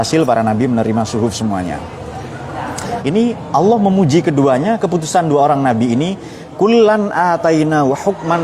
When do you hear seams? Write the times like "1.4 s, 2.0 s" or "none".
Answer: 3.0 s